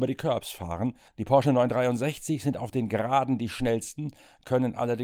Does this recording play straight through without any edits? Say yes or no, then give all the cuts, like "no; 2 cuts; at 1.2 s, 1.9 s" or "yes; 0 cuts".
no; 1 cut; at 1.1 s